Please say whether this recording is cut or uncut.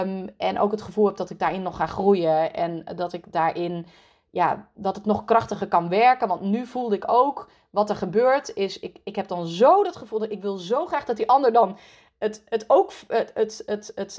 uncut